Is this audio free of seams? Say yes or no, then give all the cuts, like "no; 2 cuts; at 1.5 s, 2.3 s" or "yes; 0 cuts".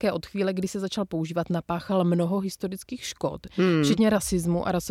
no; 1 cut; at 3.5 s